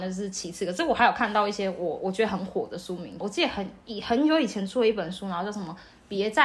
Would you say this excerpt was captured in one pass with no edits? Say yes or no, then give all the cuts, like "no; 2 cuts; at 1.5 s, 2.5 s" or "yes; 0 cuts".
no; 1 cut; at 3.2 s